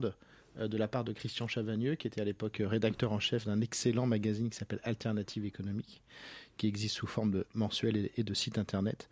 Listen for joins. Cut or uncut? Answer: uncut